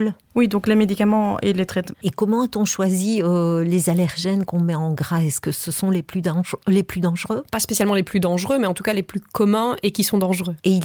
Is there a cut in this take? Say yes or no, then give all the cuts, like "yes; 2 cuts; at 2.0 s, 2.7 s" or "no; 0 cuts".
yes; 1 cut; at 1.9 s